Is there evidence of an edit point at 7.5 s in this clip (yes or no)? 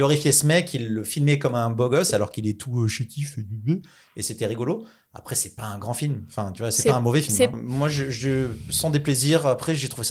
yes